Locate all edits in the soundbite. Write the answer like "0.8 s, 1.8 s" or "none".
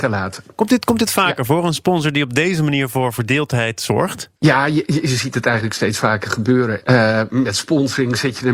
4.4 s, 6.8 s